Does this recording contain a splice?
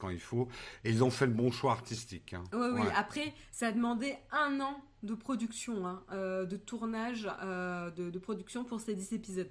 no; 0 cuts

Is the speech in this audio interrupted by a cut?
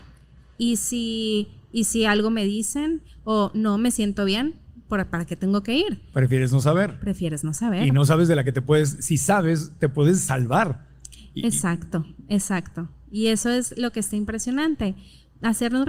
no; 0 cuts

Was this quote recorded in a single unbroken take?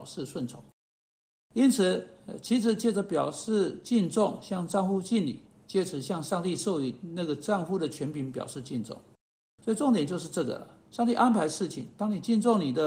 no; 1 cut; at 10.8 s

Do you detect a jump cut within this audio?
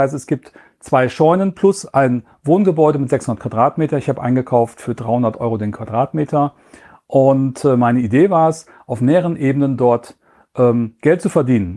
no; 0 cuts

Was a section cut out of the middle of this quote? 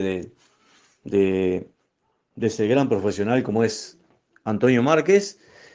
no; 0 cuts

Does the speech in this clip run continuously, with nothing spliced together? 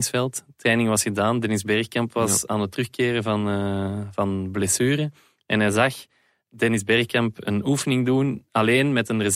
yes; 0 cuts

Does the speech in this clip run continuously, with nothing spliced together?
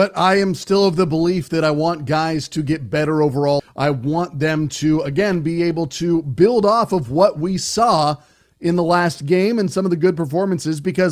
no; 1 cut; at 3.6 s

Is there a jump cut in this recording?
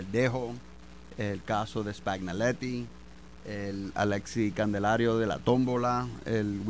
no; 0 cuts

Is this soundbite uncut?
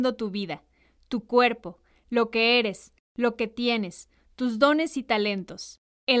yes; 0 cuts

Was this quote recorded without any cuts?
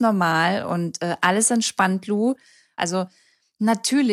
no; 1 cut; at 2.8 s

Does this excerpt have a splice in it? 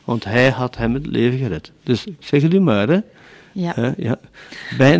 no; 0 cuts

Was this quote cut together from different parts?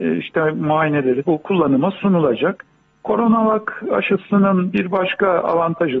yes; 1 cut; at 1.3 s

